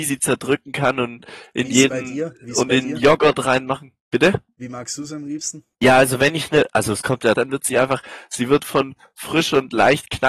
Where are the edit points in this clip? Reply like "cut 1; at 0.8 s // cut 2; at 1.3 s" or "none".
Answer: cut 1; at 5.7 s // cut 2; at 7.3 s